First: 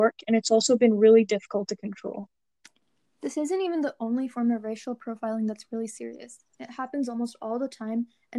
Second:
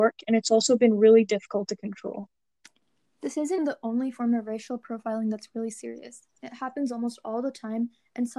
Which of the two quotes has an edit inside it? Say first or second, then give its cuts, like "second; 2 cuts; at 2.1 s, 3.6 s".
second; 1 cut; at 3.6 s